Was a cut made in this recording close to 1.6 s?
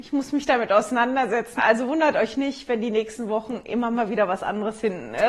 yes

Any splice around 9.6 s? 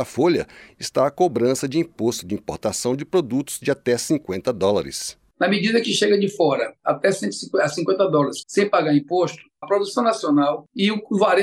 yes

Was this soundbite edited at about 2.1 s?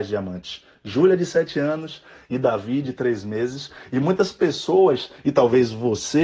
no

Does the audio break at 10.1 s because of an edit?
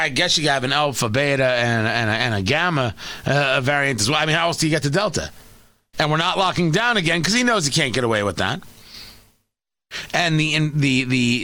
no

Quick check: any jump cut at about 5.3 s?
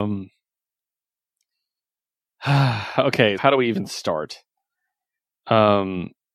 no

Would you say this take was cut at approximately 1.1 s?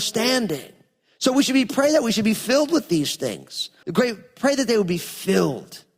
no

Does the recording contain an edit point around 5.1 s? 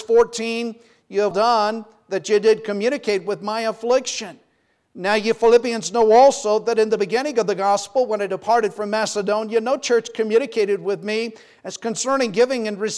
no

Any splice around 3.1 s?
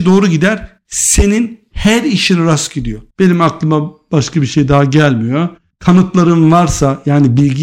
yes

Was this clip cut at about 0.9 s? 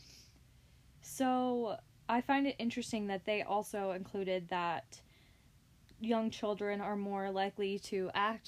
yes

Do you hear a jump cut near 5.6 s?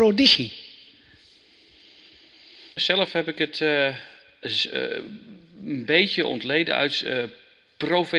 no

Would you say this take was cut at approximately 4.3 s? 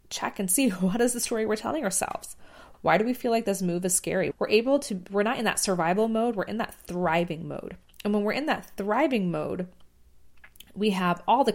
yes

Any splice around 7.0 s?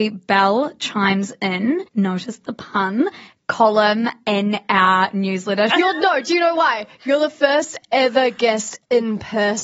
no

